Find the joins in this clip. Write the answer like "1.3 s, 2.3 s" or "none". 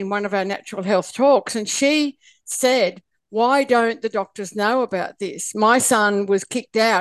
none